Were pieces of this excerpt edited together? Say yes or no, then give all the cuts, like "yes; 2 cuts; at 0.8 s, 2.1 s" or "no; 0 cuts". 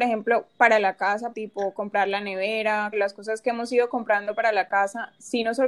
yes; 2 cuts; at 1.3 s, 2.9 s